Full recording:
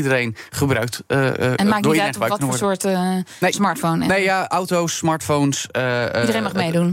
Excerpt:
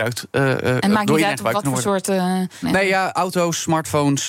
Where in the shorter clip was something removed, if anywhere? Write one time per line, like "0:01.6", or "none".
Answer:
0:02.6